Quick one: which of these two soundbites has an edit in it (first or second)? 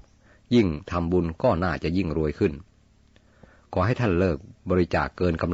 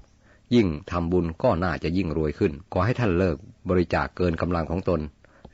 second